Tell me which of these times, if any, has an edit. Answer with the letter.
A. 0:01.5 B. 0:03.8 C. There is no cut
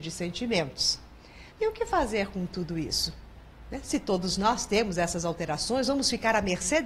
A